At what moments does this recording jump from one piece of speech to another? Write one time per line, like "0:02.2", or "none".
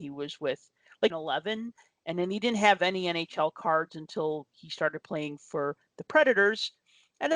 0:01.1